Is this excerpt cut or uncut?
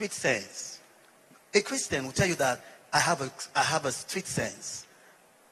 uncut